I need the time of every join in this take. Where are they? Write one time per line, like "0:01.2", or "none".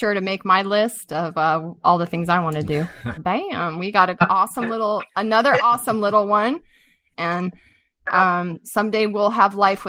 0:03.2
0:07.1